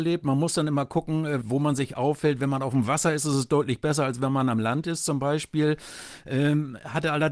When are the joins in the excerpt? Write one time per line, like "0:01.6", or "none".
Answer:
0:01.4